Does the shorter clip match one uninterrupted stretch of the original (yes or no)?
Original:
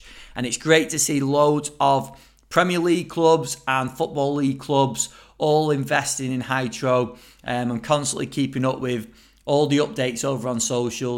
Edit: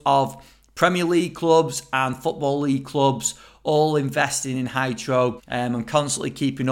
no